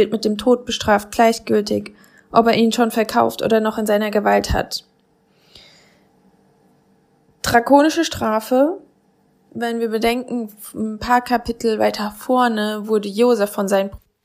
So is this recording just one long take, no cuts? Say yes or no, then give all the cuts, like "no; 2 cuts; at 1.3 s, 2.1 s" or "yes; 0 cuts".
yes; 0 cuts